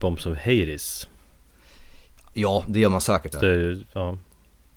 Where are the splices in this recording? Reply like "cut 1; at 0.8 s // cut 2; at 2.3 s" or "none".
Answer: cut 1; at 3.3 s